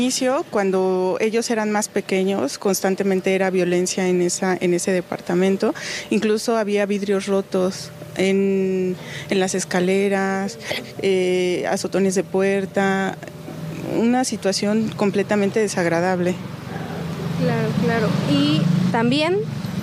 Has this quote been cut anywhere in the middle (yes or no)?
yes